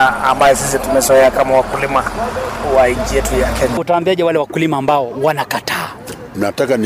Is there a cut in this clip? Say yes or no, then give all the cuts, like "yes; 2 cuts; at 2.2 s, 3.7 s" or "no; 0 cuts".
no; 0 cuts